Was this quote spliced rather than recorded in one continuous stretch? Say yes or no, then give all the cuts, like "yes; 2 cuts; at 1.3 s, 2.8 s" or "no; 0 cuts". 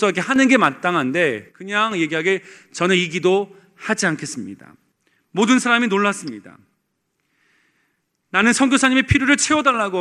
no; 0 cuts